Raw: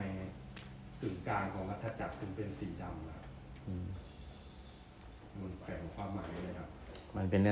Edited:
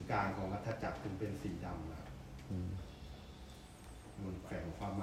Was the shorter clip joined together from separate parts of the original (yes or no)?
no